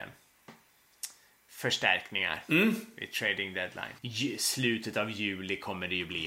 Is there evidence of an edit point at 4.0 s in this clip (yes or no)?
yes